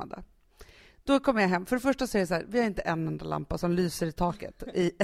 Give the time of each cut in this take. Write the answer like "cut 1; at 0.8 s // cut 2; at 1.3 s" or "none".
none